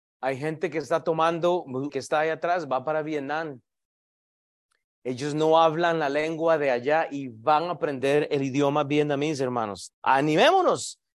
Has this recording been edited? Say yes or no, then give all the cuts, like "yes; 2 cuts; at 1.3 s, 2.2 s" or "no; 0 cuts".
yes; 3 cuts; at 1.9 s, 4.8 s, 9.9 s